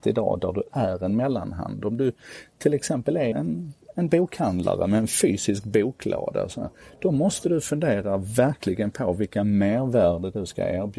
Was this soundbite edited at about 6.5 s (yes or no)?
no